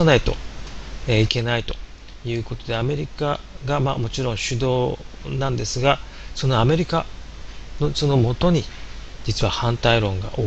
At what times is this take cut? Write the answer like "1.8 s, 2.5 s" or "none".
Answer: none